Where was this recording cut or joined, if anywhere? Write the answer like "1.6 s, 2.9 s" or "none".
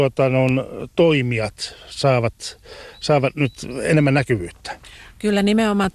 none

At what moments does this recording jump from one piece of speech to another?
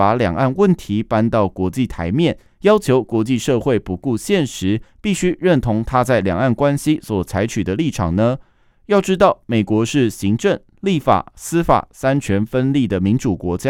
none

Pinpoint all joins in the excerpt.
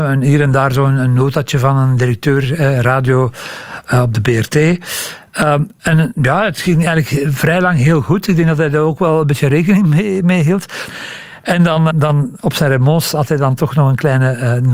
10.9 s, 11.9 s

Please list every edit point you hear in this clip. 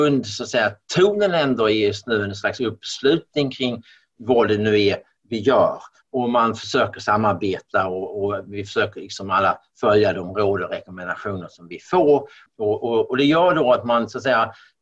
12.5 s

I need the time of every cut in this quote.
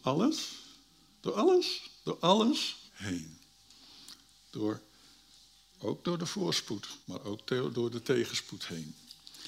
2.9 s, 7.0 s

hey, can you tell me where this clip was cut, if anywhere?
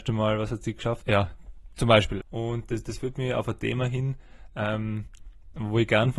1.0 s, 2.2 s

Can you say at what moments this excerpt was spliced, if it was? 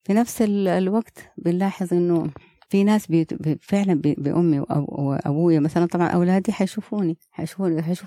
4.2 s

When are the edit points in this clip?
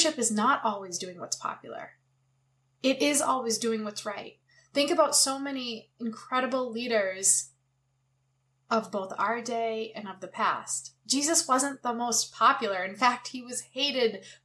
none

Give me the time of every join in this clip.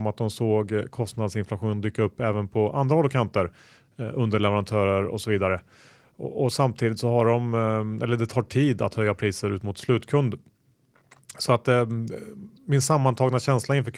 none

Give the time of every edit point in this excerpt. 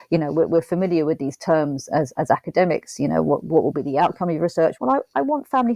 4.8 s

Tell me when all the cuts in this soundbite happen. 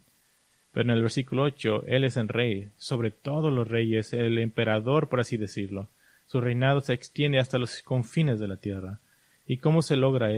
none

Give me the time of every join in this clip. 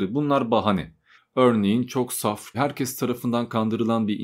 1.1 s, 2.5 s

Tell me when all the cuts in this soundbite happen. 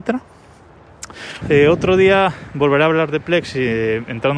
1.4 s

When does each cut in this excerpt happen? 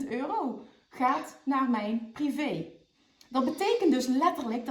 none

